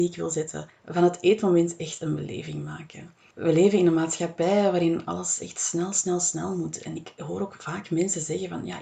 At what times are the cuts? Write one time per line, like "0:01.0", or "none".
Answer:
none